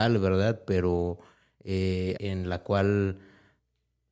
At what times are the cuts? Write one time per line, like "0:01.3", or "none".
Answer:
0:02.2